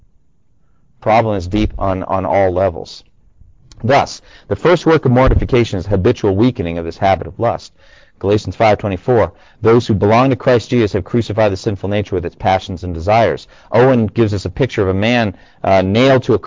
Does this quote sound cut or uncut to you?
uncut